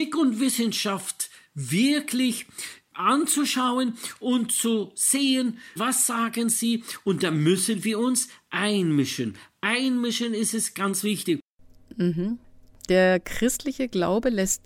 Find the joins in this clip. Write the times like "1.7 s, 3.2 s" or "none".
5.8 s